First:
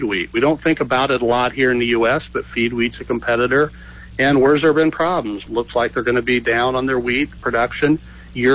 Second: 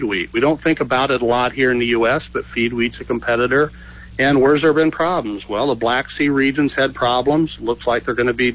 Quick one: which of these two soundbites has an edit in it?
first; 1 cut; at 5.5 s

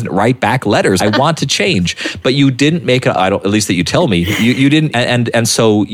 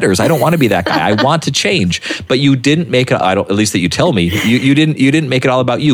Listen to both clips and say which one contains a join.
first; 2 cuts; at 1.0 s, 4.9 s

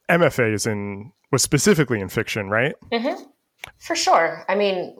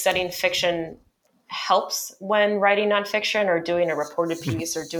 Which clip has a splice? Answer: first; 1 cut; at 3.7 s

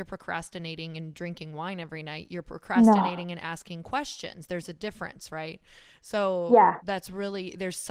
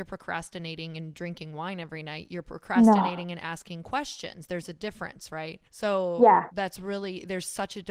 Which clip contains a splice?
second; 1 cut; at 5.7 s

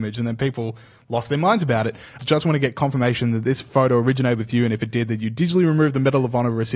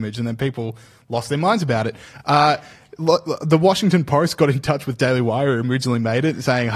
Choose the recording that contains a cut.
first; 1 cut; at 2.2 s

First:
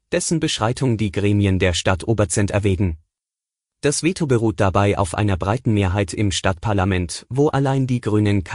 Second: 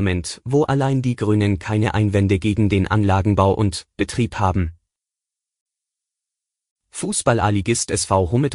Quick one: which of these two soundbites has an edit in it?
first; 1 cut; at 3.7 s

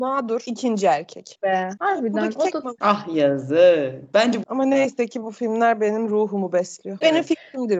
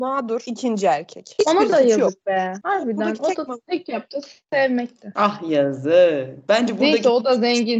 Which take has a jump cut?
first; 3 cuts; at 1.3 s, 2.8 s, 4.4 s

